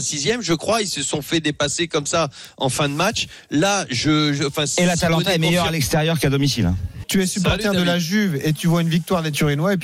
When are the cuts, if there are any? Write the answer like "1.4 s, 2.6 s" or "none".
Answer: 7.0 s